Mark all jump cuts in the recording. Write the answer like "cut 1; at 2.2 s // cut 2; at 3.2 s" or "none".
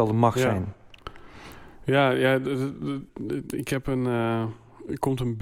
cut 1; at 3.1 s